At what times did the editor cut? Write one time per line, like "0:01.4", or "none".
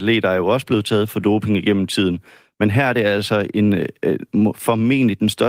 none